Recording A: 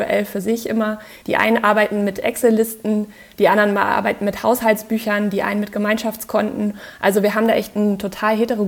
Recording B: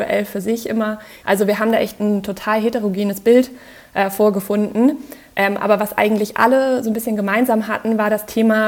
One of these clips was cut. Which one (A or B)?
B